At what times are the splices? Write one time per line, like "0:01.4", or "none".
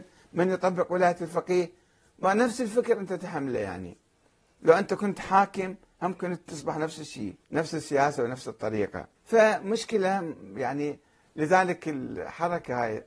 0:07.4
0:09.1